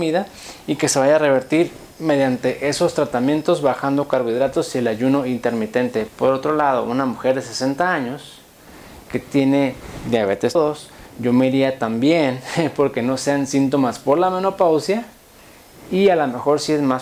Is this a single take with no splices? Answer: no; 2 cuts; at 6.1 s, 10.6 s

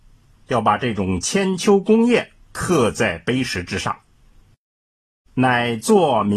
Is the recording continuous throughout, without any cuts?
no; 1 cut; at 5.3 s

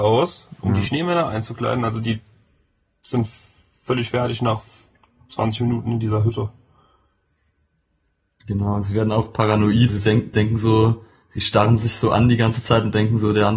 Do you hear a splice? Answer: yes; 1 cut; at 9.9 s

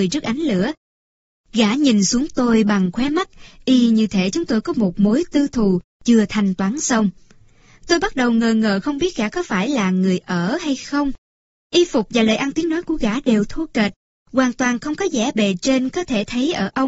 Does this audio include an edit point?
no; 0 cuts

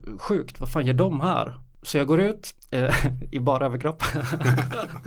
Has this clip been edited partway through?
no; 0 cuts

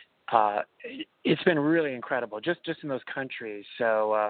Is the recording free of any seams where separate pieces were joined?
yes; 0 cuts

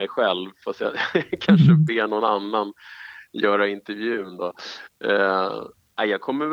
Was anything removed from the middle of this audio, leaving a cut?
no; 0 cuts

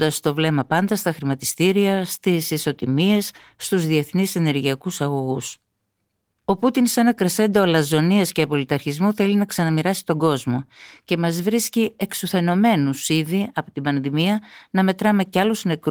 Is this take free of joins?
yes; 0 cuts

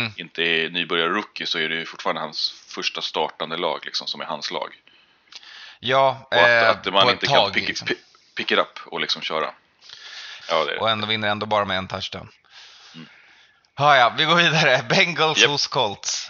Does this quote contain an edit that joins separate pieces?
yes; 1 cut; at 10.4 s

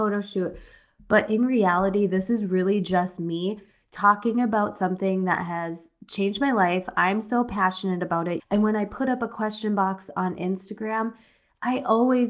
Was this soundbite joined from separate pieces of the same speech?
yes; 1 cut; at 8.4 s

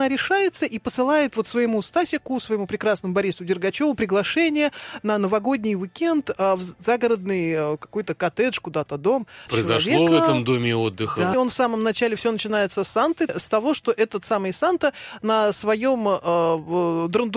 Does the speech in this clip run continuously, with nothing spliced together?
no; 3 cuts; at 9.5 s, 11.3 s, 13.3 s

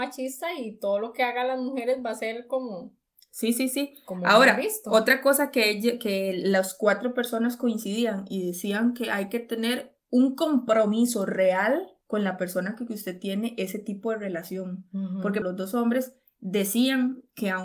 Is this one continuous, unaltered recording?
no; 2 cuts; at 12.0 s, 15.4 s

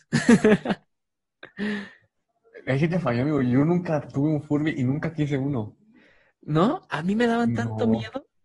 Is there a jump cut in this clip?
no; 0 cuts

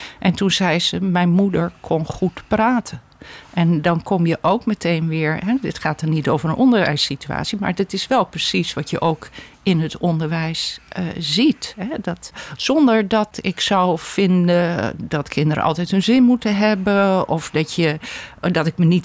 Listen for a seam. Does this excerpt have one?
no; 0 cuts

